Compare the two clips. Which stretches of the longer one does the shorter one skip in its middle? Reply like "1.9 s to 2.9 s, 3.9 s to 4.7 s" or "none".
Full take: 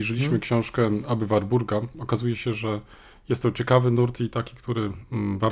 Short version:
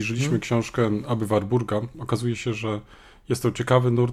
none